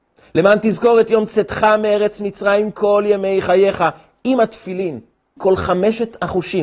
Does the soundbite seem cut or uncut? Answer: cut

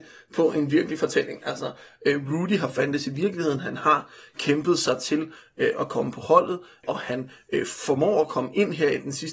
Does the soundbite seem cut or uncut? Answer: uncut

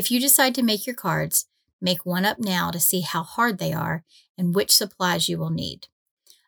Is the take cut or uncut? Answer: uncut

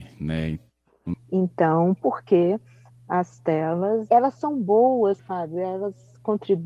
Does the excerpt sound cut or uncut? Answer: cut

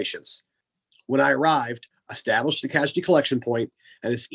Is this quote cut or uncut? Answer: cut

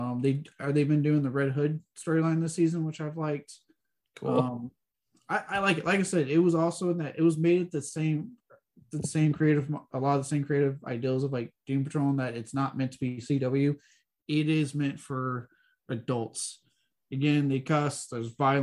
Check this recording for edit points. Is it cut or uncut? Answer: uncut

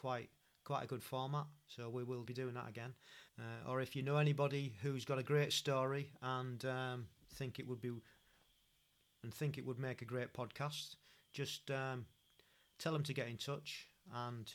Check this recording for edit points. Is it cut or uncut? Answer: cut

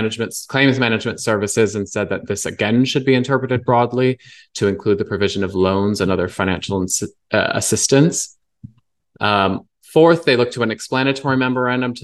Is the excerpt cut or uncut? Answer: cut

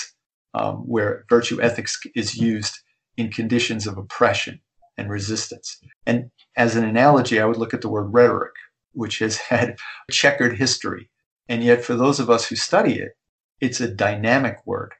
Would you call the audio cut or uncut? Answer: cut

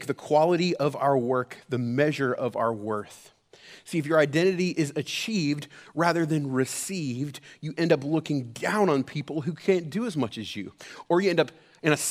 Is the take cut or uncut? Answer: uncut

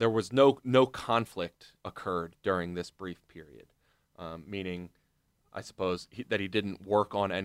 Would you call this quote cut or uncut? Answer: uncut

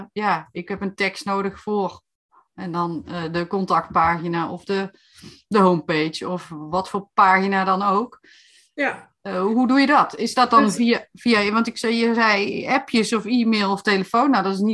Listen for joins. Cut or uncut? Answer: uncut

